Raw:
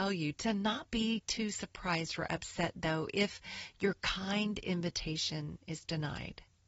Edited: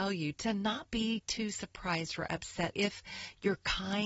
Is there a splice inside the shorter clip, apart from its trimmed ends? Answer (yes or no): yes